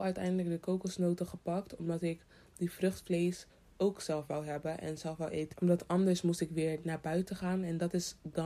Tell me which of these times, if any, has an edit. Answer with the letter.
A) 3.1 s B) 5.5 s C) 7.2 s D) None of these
B